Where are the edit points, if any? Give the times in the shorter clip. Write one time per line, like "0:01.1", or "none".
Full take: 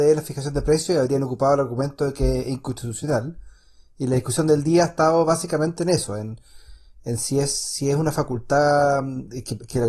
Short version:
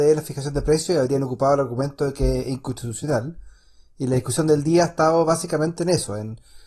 none